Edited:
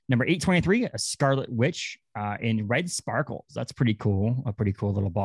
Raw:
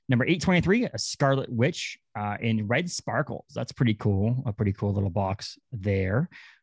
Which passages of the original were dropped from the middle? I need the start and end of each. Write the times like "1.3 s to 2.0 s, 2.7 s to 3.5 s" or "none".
none